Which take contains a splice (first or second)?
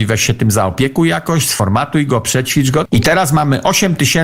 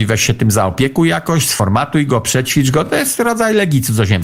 first